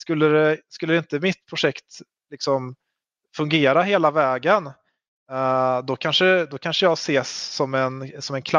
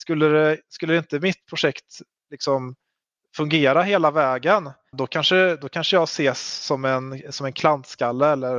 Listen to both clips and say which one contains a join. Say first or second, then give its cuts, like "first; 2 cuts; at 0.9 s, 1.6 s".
second; 1 cut; at 4.9 s